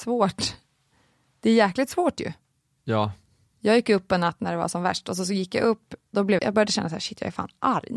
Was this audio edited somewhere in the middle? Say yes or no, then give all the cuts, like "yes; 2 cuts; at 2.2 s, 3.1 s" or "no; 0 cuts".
yes; 1 cut; at 6.4 s